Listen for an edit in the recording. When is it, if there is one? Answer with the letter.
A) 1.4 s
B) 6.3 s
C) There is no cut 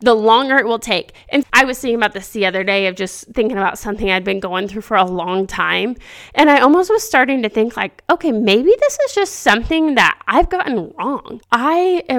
A